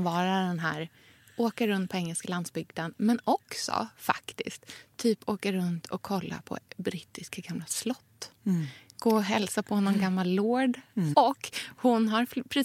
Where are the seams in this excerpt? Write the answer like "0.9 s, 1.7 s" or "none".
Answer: 11.1 s